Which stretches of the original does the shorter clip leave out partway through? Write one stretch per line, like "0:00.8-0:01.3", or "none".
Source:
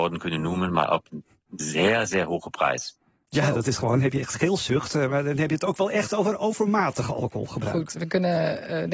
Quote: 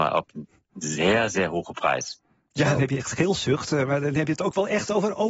0:03.5-0:04.0